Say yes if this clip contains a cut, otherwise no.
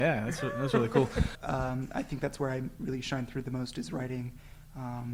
yes